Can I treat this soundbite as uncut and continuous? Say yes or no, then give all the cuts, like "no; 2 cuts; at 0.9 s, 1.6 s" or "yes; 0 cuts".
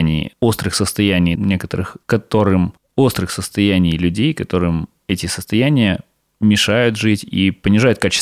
no; 1 cut; at 1.4 s